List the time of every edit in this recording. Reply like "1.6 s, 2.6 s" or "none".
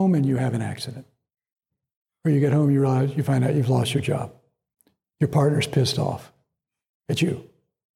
none